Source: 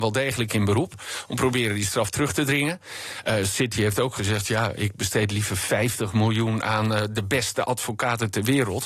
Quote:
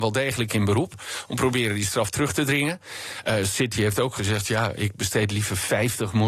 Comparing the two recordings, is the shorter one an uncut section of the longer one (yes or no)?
yes